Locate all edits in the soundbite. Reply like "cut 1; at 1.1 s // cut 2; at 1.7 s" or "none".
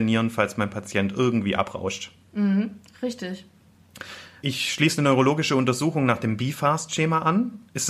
none